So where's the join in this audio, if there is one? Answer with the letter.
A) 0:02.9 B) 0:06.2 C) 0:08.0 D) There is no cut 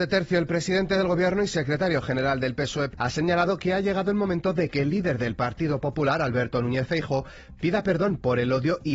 A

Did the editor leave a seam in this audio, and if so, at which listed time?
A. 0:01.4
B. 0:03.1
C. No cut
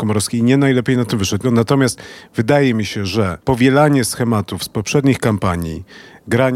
A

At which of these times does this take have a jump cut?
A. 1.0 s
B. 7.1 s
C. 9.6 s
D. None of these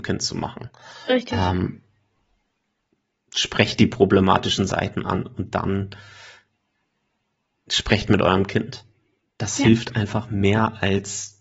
D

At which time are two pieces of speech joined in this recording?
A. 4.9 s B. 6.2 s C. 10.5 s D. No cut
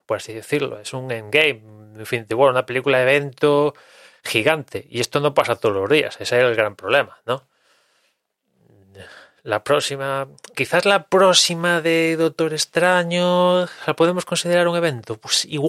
C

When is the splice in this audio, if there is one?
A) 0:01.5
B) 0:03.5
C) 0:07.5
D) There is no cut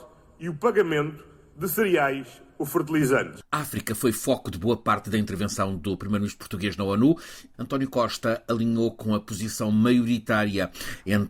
C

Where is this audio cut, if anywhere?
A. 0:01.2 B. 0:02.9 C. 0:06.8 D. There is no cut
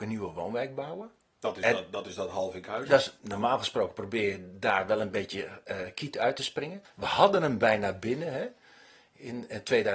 C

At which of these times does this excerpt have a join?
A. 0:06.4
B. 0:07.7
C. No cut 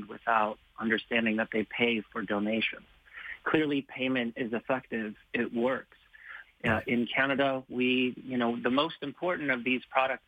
A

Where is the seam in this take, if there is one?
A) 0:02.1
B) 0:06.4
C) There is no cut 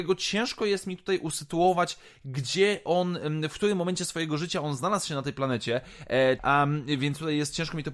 B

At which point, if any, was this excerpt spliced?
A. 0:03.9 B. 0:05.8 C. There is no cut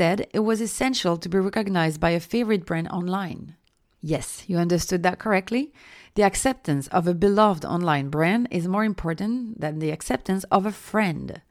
C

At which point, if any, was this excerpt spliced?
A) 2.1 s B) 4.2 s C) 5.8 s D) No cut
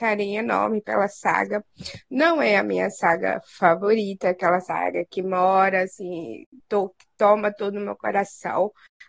D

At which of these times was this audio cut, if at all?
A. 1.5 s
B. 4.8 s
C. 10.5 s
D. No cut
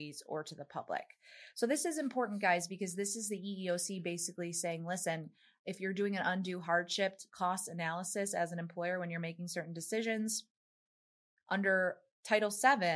D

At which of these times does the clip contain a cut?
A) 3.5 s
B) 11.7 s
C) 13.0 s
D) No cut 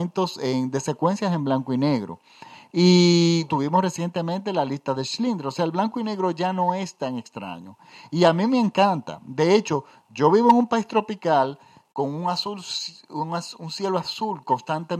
A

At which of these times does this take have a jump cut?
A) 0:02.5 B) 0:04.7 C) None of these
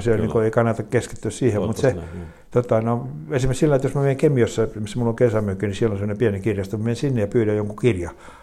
C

